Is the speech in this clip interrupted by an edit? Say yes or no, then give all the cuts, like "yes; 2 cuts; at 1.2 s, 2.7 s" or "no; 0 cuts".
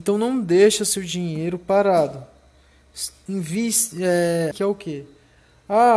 yes; 2 cuts; at 3.3 s, 4.5 s